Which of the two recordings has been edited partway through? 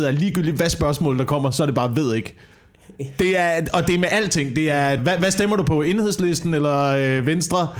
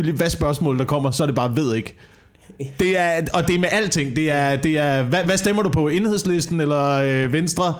first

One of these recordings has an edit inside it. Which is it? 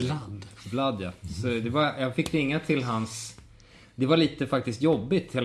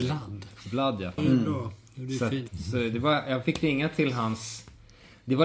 second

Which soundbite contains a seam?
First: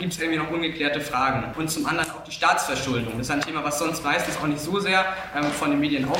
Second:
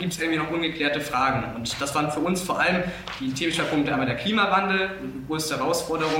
first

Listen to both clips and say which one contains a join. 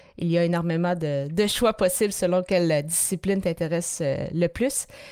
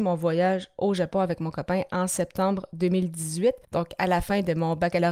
second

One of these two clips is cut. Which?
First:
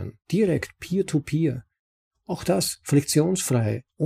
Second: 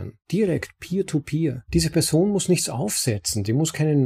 second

